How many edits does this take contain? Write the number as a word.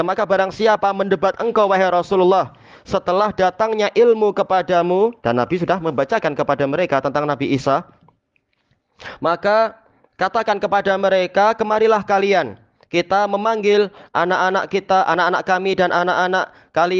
zero